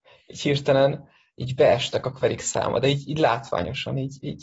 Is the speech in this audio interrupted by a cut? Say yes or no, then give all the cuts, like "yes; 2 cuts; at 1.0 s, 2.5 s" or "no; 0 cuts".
no; 0 cuts